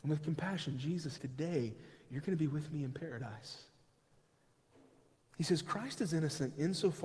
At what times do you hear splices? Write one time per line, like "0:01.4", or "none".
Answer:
0:01.2
0:05.1